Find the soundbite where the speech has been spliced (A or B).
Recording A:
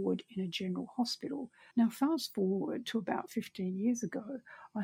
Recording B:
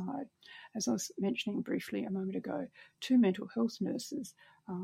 A